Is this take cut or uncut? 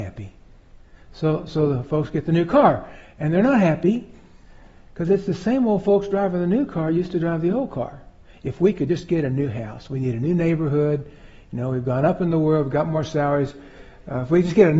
uncut